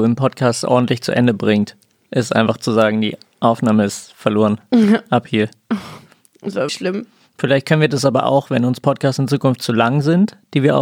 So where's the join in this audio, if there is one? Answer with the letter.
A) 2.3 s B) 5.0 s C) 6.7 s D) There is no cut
C